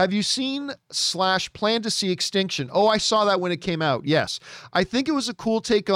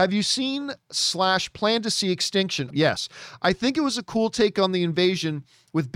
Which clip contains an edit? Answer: second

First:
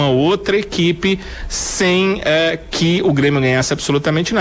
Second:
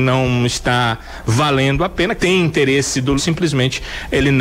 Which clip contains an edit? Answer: second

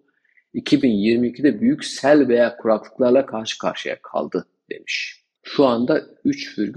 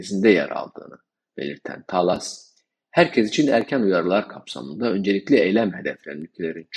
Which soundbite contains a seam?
first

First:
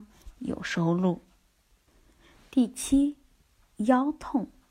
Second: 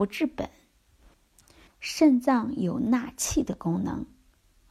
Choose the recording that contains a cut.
second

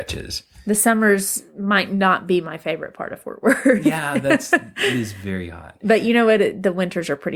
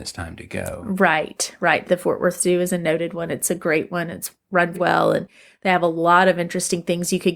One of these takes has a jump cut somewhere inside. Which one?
second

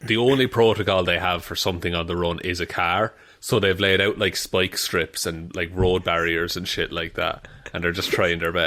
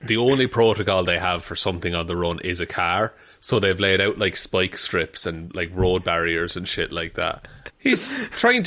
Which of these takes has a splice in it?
second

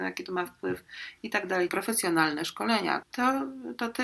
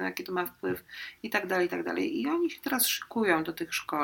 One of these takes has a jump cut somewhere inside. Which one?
first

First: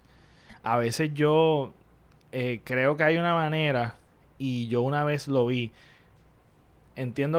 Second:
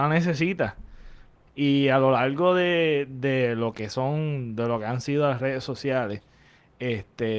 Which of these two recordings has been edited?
second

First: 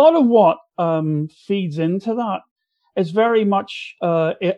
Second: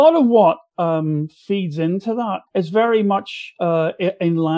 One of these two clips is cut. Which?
second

